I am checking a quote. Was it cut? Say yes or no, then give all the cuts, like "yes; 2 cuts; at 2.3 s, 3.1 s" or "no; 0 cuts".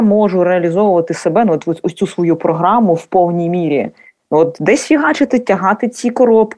no; 0 cuts